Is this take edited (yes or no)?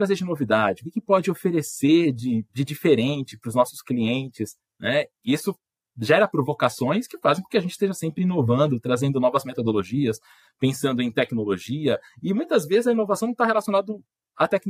no